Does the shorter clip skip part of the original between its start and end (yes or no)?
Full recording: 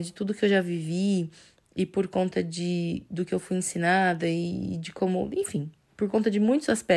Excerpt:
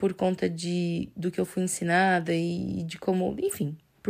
no